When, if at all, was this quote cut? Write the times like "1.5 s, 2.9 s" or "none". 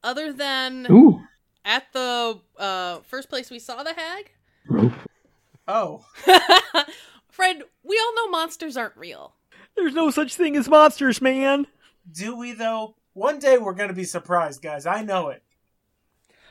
5.0 s